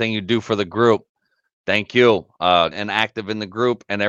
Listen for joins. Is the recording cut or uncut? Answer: cut